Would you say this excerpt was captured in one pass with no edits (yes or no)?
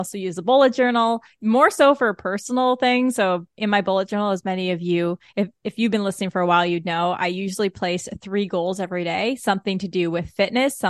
yes